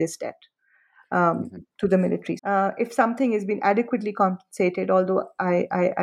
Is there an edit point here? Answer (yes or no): yes